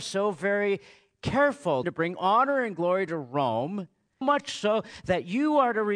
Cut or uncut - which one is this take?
cut